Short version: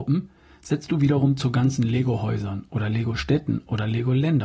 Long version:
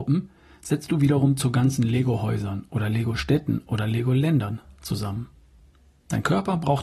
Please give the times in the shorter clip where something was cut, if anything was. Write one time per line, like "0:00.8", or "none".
none